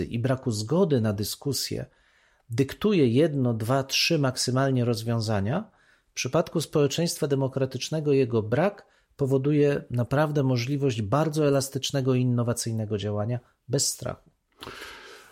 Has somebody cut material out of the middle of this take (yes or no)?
no